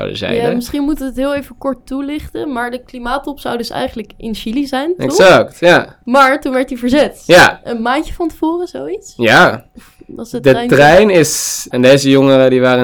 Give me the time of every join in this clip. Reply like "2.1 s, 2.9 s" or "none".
9.8 s, 11.7 s